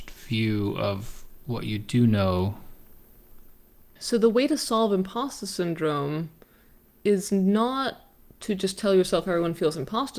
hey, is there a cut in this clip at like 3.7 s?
no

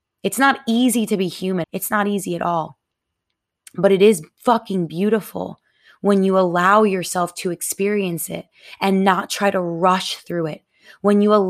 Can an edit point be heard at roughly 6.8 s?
no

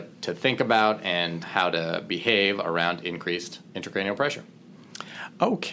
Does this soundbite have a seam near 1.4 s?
yes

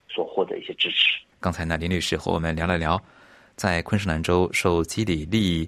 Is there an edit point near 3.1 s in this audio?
no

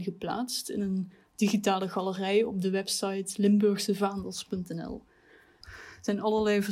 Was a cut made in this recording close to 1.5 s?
no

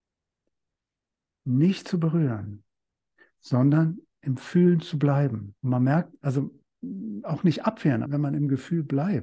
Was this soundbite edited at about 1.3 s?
no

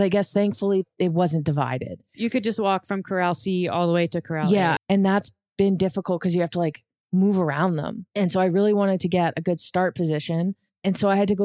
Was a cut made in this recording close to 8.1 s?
no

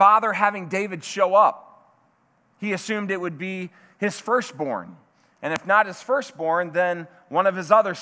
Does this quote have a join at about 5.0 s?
no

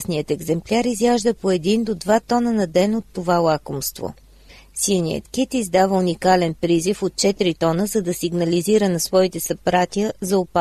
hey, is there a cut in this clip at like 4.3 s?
no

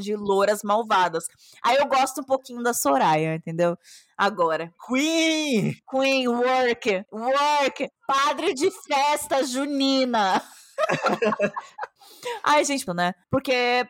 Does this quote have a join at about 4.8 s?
no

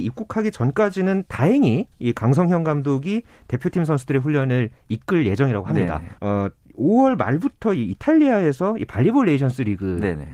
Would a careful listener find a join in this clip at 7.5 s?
no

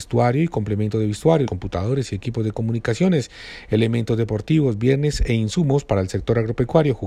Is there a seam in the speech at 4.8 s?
no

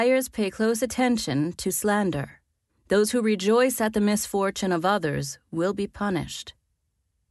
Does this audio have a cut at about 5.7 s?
no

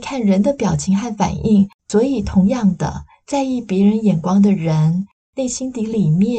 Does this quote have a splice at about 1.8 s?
yes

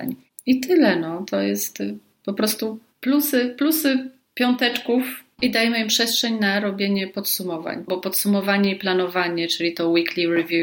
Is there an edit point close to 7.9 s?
yes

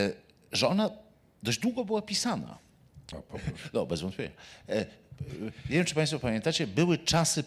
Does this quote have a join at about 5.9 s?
no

